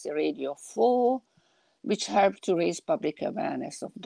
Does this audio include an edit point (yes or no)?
no